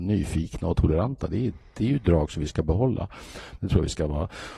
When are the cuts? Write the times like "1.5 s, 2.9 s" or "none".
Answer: 3.6 s